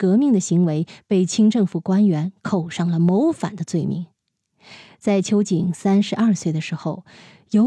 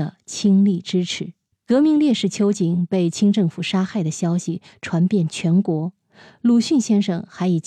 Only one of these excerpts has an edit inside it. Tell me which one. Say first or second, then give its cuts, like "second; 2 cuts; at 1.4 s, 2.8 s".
second; 1 cut; at 1.5 s